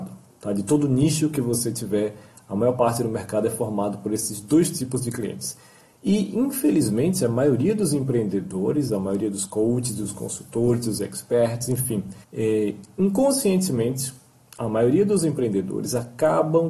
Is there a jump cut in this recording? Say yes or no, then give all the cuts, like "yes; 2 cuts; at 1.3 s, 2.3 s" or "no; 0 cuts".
yes; 1 cut; at 12.2 s